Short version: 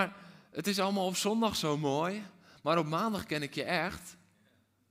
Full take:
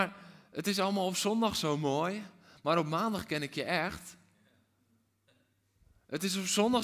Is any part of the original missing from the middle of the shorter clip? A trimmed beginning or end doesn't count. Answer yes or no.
no